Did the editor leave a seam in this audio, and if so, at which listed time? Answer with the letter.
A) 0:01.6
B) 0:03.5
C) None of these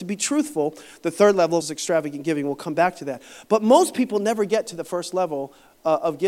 A